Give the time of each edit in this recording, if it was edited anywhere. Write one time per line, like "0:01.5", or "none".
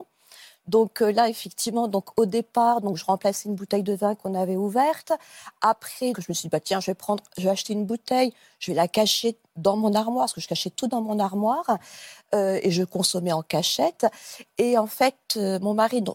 0:06.1